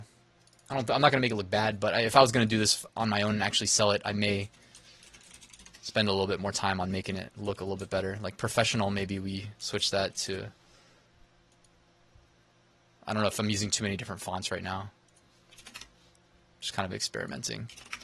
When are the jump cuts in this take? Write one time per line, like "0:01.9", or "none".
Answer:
none